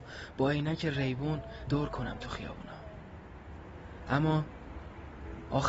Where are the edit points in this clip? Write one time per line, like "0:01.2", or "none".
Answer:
0:01.7